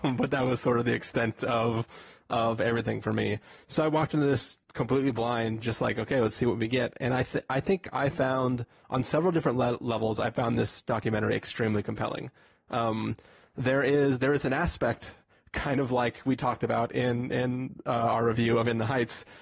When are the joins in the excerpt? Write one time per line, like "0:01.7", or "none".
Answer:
0:04.6